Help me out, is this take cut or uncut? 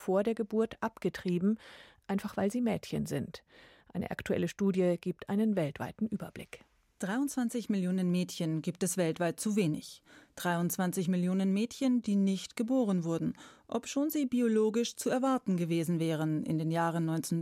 uncut